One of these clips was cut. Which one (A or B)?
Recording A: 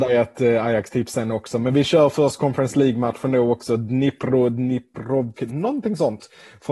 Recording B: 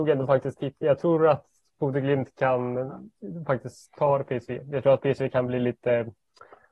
A